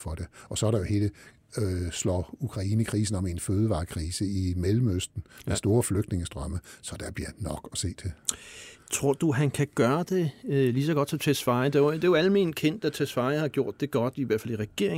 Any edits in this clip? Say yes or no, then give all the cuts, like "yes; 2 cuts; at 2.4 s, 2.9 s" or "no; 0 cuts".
no; 0 cuts